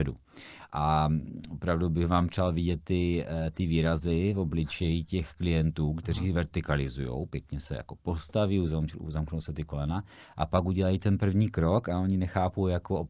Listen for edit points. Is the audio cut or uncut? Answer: uncut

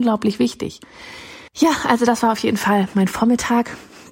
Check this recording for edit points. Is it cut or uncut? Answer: cut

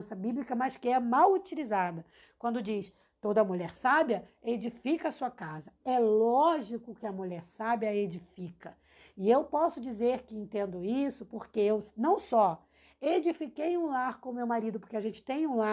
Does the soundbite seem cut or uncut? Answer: uncut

